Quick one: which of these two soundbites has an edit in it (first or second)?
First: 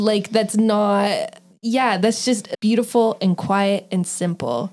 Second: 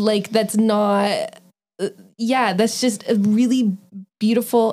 first